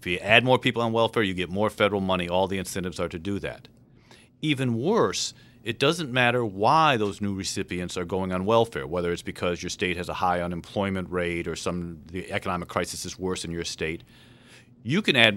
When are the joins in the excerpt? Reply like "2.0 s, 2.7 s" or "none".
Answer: none